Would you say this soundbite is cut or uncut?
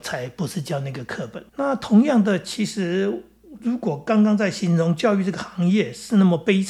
cut